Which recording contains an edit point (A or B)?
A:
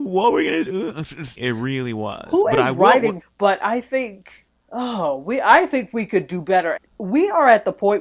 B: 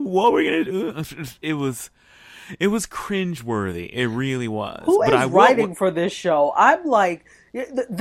A